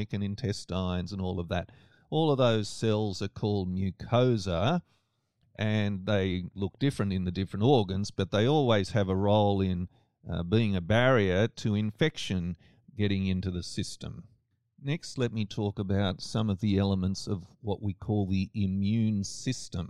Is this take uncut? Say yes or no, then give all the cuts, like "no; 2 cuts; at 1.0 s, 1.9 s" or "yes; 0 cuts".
yes; 0 cuts